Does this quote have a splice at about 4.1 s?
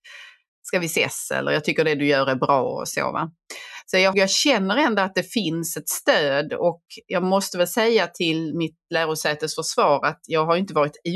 yes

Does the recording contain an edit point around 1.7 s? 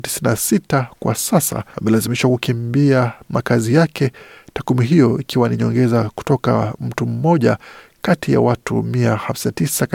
yes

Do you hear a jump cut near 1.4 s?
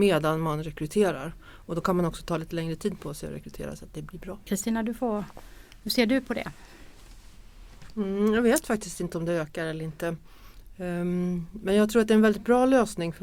no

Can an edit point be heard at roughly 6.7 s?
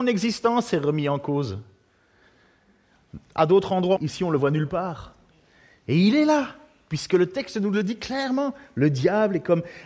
no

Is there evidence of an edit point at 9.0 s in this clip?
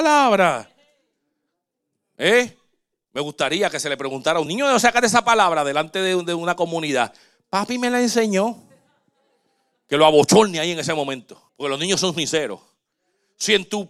no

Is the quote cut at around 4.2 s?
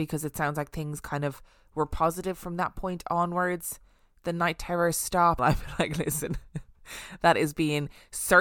no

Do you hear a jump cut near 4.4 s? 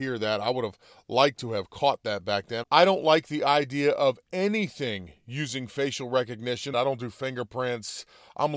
no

